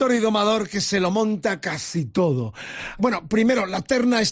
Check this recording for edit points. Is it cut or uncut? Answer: cut